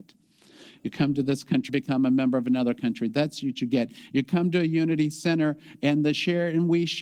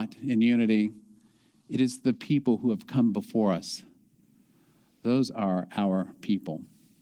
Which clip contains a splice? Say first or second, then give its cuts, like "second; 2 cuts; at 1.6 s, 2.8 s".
first; 1 cut; at 1.7 s